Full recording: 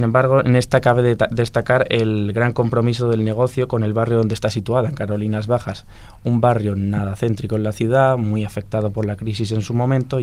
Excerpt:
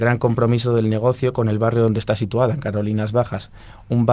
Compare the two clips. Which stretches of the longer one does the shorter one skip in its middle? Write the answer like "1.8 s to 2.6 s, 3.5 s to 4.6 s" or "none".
none